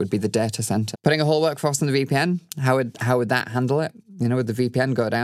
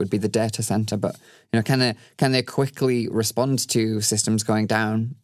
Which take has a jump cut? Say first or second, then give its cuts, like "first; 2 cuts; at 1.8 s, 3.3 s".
first; 1 cut; at 0.9 s